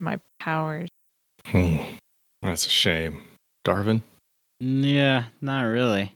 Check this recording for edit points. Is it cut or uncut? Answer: uncut